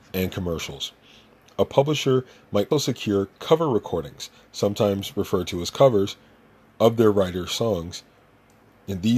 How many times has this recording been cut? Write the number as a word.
one